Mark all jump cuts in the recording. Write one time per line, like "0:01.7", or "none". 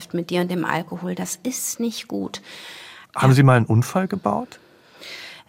0:03.1